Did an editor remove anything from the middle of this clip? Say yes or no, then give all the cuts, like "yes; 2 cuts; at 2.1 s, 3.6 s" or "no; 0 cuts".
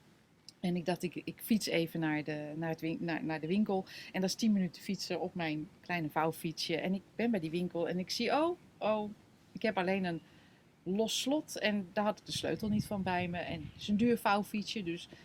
no; 0 cuts